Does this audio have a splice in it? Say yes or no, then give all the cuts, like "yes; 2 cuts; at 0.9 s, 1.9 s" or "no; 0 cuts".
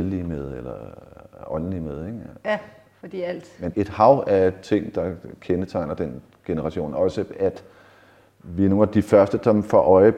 yes; 1 cut; at 3.7 s